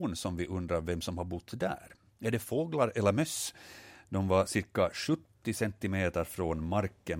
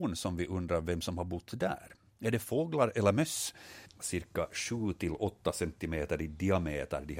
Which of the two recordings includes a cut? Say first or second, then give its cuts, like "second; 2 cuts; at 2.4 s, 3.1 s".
second; 1 cut; at 3.8 s